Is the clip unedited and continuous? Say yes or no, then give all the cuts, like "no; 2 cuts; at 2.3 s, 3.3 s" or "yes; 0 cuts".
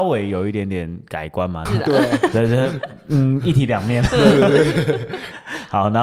no; 1 cut; at 1.7 s